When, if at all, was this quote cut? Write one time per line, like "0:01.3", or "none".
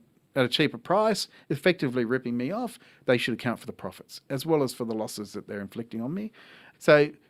none

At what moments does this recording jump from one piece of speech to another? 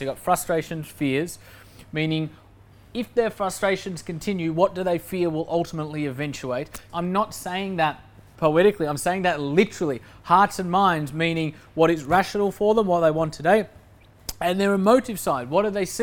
0:06.9
0:08.3

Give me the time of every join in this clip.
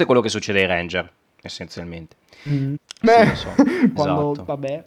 0:02.8
0:04.0

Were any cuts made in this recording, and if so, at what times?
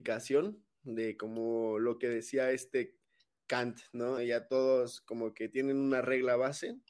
0:04.2

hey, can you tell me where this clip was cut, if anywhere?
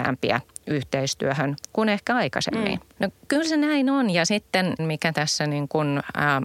0:03.0
0:04.8

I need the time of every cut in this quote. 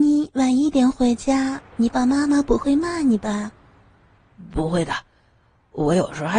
0:01.9

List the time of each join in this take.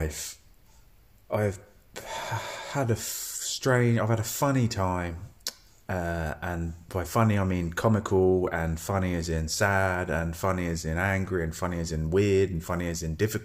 none

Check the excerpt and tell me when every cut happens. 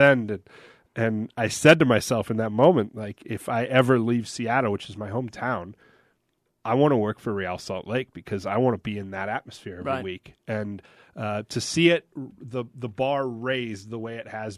none

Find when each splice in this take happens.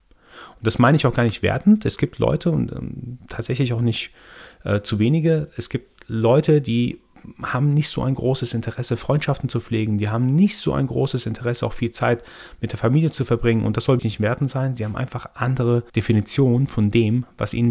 0:14.0
0:15.9

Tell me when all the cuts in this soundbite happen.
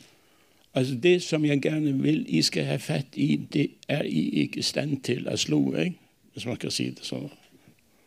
none

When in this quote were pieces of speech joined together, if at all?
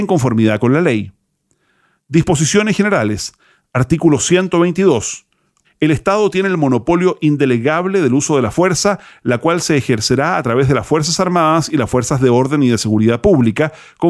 0:02.0
0:05.6

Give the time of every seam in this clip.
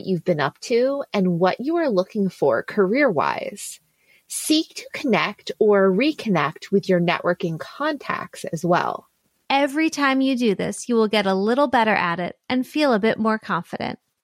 0:09.4

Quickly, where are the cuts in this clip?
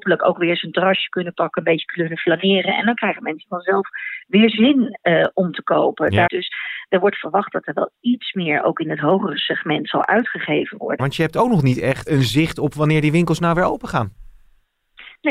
0:06.3
0:11.0
0:12.1

